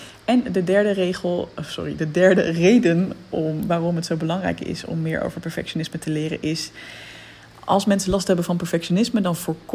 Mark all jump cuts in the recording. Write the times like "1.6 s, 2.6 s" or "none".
none